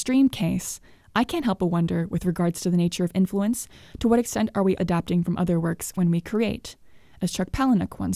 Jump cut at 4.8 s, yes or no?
yes